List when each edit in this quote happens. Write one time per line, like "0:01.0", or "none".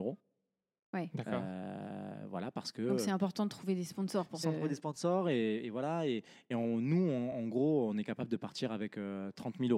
0:04.4